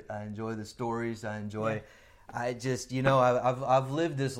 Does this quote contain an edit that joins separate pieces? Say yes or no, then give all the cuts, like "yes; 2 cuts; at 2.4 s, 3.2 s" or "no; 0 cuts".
no; 0 cuts